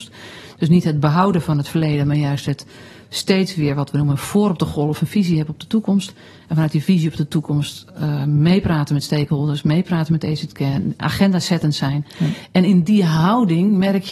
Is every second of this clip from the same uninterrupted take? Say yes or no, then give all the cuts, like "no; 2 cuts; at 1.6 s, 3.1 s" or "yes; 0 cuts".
yes; 0 cuts